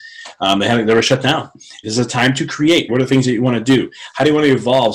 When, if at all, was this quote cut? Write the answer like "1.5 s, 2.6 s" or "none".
1.8 s, 2.9 s